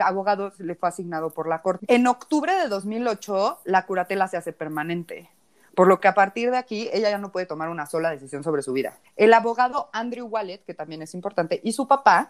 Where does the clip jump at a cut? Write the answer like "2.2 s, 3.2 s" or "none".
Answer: 1.8 s, 9.0 s